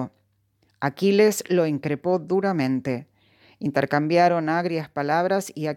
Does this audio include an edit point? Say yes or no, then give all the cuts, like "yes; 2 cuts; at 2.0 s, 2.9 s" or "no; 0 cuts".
no; 0 cuts